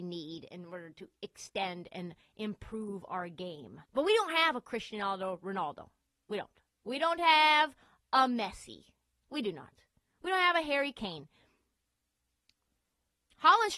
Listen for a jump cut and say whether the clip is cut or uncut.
cut